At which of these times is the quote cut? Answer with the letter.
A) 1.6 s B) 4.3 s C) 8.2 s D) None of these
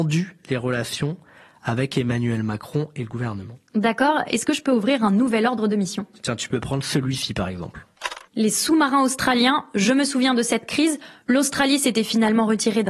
C